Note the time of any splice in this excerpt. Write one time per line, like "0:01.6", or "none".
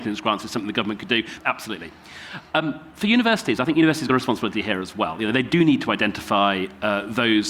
0:01.4